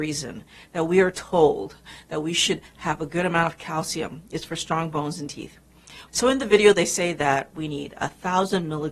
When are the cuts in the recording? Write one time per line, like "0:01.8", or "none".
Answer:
0:06.1

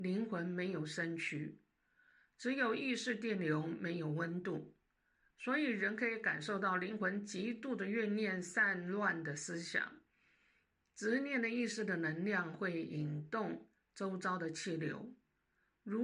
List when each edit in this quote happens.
none

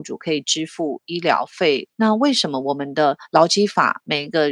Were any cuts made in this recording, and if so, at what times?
0:02.0

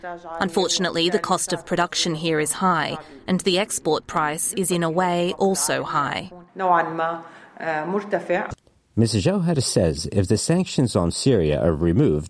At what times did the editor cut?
0:06.5

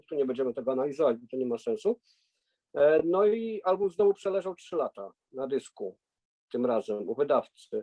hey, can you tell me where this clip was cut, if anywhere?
none

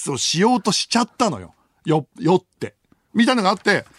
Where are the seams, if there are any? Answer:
0:03.1

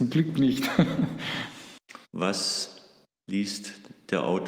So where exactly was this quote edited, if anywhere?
0:02.0

